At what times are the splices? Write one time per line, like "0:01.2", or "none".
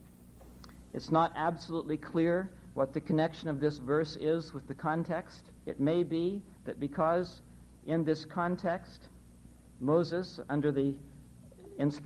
0:05.6